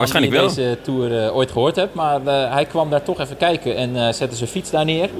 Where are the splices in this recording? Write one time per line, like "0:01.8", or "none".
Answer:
none

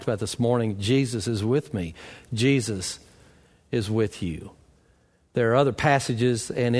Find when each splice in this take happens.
none

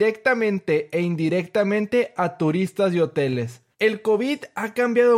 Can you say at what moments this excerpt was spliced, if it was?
0:03.7

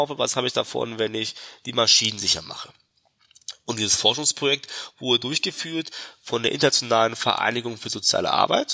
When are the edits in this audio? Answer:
none

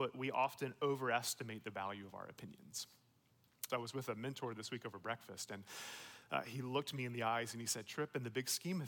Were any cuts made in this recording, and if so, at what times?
0:03.7

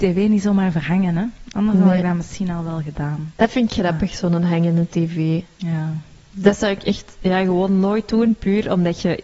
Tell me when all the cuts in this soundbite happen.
none

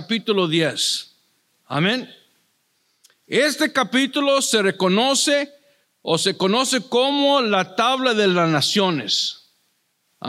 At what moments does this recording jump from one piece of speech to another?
none

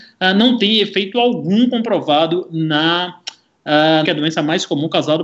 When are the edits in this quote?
0:04.0

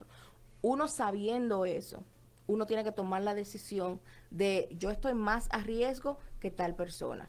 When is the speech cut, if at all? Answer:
0:04.7

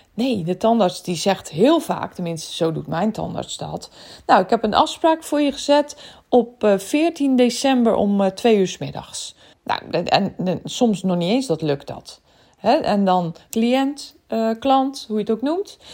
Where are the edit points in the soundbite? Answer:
0:09.5
0:13.5

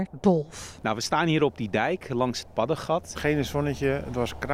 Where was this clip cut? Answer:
0:03.1

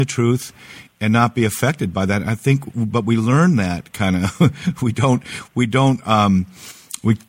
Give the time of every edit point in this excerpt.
none

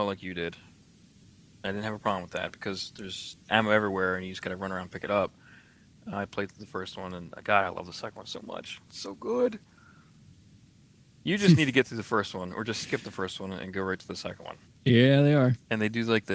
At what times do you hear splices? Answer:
0:06.1
0:14.7

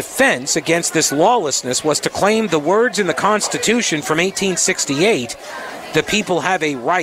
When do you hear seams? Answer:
none

